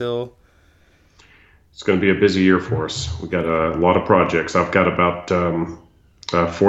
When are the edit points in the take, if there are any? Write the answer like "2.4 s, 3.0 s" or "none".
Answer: none